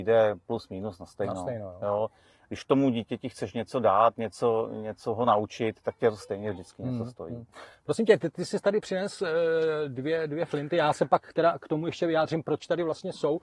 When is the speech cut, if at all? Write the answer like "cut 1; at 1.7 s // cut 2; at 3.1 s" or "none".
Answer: none